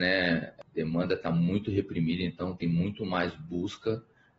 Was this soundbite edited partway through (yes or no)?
no